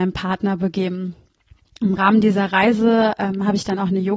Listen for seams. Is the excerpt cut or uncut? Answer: uncut